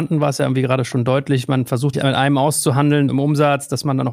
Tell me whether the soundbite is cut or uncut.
cut